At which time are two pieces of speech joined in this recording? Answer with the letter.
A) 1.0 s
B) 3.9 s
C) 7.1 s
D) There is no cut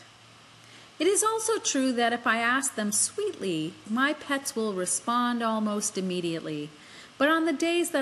B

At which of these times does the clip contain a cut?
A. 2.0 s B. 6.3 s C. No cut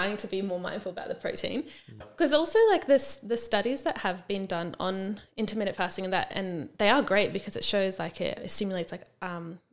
A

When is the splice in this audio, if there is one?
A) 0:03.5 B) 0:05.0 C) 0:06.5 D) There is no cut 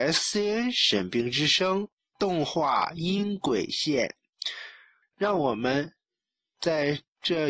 B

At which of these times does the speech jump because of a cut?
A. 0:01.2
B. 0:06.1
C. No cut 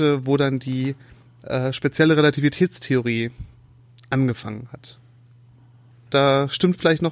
B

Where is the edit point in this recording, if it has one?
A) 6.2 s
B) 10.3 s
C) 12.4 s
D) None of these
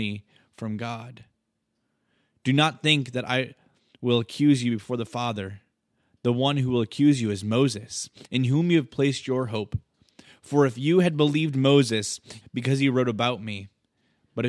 C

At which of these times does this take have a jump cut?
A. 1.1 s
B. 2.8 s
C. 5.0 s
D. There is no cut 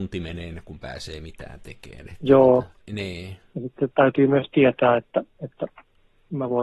B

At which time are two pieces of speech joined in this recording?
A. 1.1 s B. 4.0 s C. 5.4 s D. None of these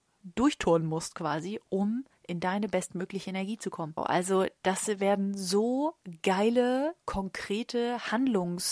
B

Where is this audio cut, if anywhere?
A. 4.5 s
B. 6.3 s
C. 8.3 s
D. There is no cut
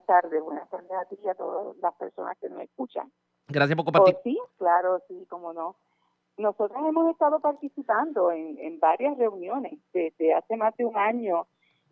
A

